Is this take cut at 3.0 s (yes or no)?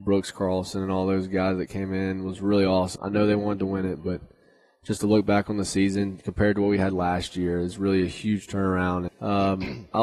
yes